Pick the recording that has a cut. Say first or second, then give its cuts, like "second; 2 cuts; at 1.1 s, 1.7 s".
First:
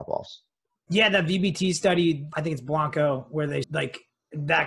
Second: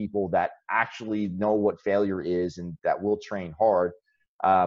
first; 2 cuts; at 2.3 s, 3.6 s